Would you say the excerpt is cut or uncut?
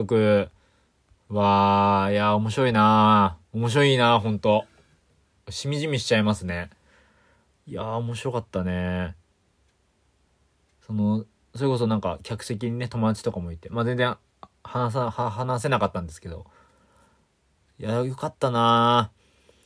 cut